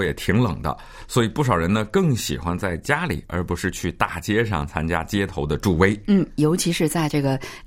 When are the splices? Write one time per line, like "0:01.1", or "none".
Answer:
none